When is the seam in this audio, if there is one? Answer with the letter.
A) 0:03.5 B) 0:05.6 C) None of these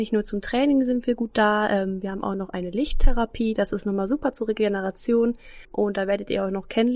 B